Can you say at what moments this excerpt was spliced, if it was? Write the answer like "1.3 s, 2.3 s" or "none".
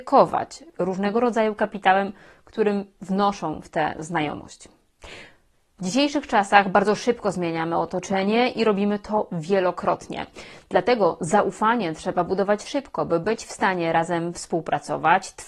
5.8 s